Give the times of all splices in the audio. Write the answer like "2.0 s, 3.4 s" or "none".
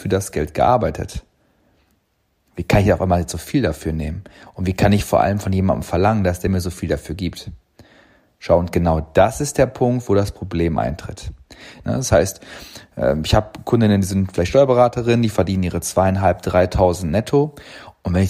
11.8 s